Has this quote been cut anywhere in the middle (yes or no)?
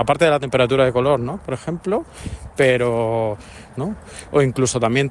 yes